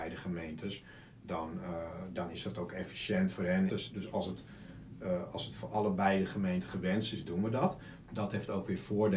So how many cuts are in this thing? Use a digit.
2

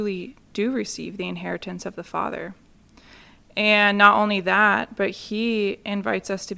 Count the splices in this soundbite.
0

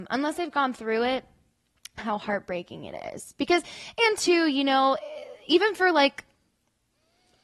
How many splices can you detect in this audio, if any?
0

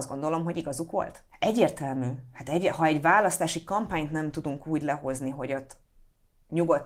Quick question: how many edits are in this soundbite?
1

